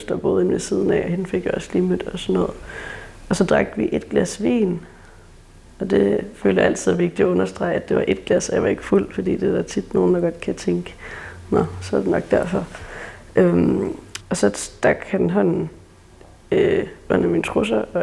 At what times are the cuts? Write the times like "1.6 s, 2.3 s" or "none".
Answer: 14.2 s